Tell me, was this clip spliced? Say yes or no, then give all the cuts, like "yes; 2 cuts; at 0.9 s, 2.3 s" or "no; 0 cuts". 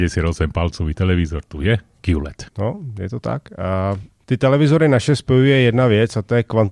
no; 0 cuts